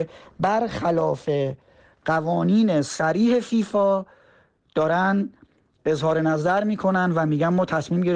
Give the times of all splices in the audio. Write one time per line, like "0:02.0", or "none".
none